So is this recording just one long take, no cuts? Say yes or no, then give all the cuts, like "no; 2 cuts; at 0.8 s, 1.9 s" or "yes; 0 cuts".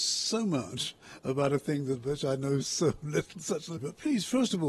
no; 1 cut; at 3.8 s